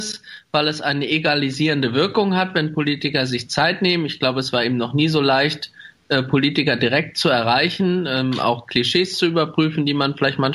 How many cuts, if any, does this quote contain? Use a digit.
0